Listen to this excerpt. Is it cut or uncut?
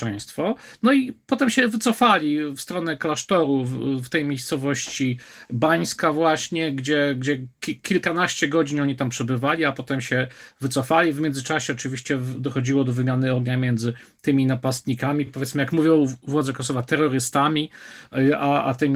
uncut